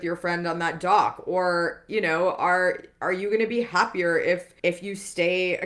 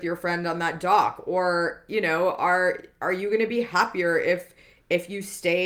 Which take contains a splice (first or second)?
first